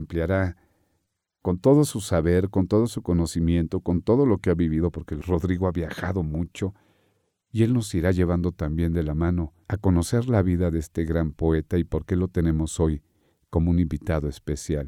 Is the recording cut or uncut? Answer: uncut